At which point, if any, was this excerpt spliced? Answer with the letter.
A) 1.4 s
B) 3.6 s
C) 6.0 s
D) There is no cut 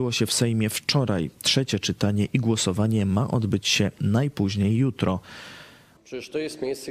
C